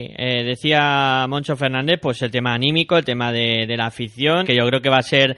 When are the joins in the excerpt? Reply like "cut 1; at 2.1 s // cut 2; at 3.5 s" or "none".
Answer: cut 1; at 4.4 s